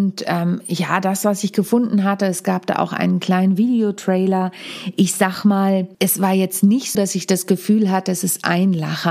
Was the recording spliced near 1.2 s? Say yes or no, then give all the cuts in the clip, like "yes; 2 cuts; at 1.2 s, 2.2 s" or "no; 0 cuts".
no; 2 cuts; at 5.9 s, 6.9 s